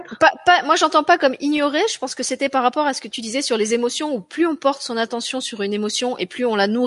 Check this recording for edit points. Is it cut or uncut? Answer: uncut